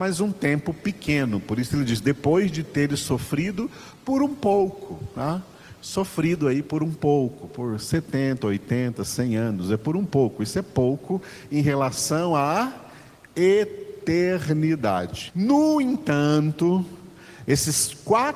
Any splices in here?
yes; 1 cut; at 15.3 s

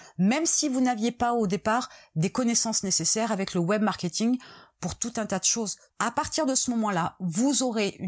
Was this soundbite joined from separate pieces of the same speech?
yes; 1 cut; at 5.9 s

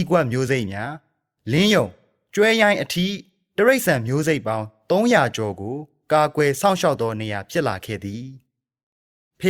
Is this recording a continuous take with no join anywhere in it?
yes; 0 cuts

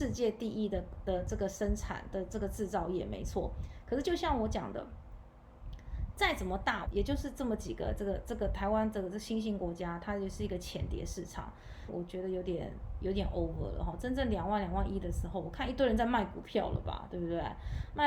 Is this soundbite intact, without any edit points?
no; 2 cuts; at 6.9 s, 11.9 s

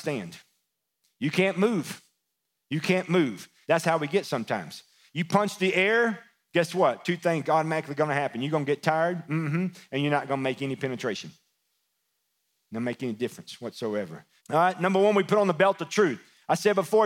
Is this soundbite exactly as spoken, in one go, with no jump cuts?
no; 2 cuts; at 3.6 s, 14.4 s

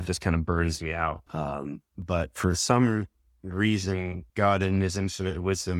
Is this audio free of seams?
no; 2 cuts; at 1.3 s, 4.3 s

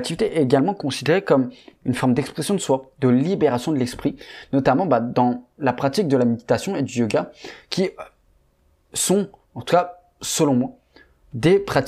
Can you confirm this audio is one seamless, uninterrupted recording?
yes; 0 cuts

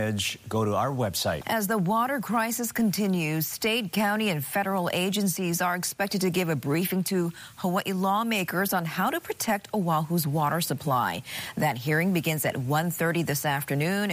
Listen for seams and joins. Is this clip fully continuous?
no; 1 cut; at 1.4 s

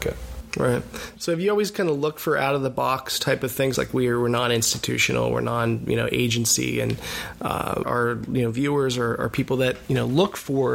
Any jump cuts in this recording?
yes; 2 cuts; at 3.7 s, 7.8 s

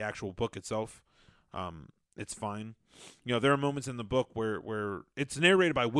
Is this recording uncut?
yes; 0 cuts

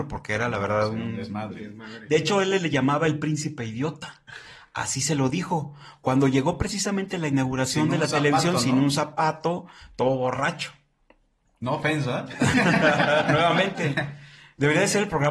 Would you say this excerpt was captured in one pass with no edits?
yes; 0 cuts

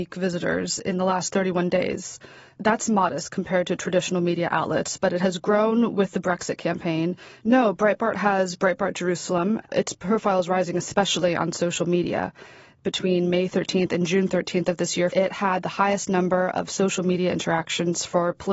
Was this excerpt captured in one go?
no; 3 cuts; at 7.4 s, 9.6 s, 15.1 s

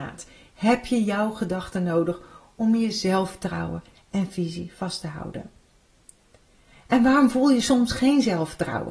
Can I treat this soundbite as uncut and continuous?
yes; 0 cuts

